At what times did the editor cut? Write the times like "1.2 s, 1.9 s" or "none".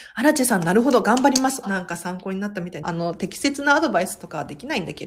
1.6 s, 2.8 s